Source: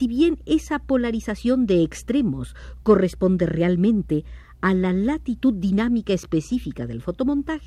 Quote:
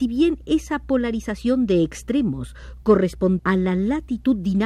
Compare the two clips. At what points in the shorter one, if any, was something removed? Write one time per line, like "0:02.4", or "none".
0:03.4